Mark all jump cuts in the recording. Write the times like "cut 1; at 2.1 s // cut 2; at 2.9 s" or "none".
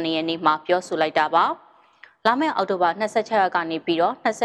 none